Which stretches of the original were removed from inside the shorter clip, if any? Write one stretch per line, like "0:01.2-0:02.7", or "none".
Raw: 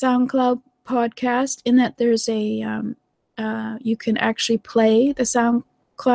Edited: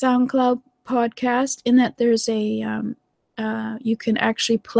none